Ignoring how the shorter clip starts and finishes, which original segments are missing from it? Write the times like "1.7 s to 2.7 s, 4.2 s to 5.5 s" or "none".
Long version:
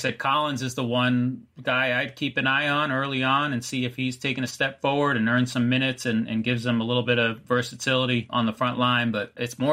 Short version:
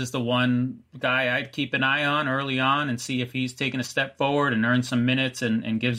none